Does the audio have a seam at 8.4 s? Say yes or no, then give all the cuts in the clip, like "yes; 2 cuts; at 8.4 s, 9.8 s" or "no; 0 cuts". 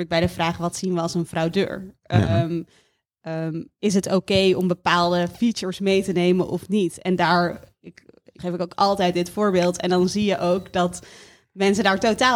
yes; 1 cut; at 8.4 s